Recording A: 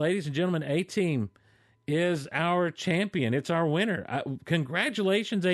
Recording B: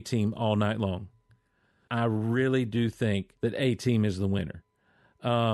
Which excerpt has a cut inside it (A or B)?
B